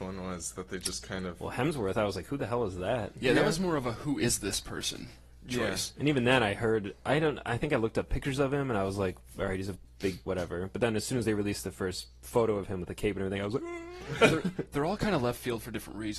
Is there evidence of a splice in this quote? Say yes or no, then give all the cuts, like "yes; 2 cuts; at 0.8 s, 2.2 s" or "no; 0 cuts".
yes; 1 cut; at 10.3 s